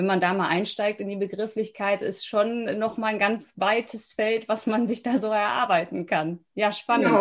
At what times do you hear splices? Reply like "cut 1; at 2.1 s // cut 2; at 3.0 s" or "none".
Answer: none

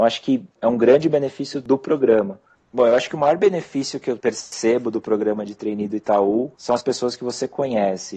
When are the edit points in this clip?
cut 1; at 2.5 s

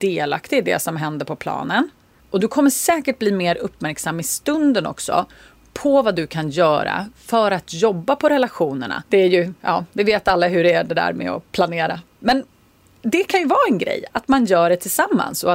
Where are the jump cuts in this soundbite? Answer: cut 1; at 2.2 s // cut 2; at 9.0 s

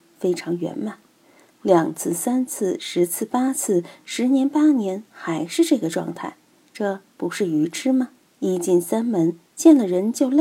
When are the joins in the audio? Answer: cut 1; at 8.2 s

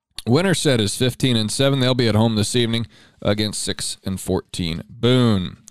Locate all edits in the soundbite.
none

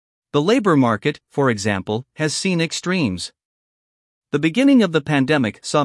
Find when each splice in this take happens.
none

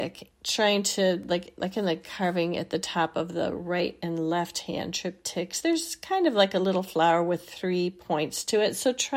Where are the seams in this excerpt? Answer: none

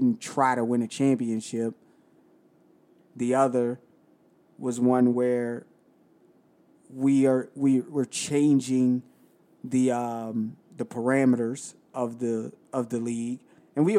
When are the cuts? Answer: cut 1; at 3.0 s

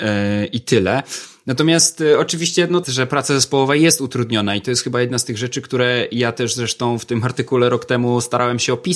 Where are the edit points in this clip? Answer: cut 1; at 2.8 s

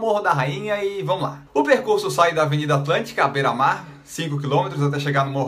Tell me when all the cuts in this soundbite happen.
cut 1; at 1.5 s

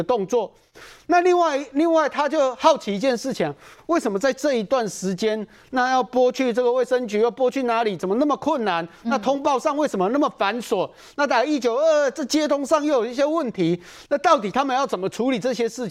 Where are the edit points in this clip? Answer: none

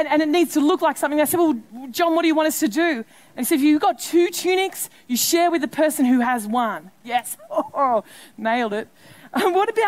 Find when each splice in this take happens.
cut 1; at 7.0 s

